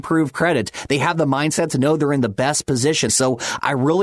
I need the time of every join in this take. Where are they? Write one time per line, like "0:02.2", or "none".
0:03.1